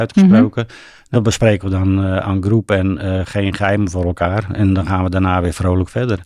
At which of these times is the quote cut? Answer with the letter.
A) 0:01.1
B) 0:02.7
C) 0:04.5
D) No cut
A